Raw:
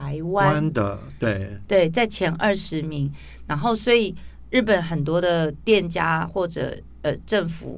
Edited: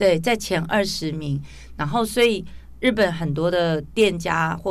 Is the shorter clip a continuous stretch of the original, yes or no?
yes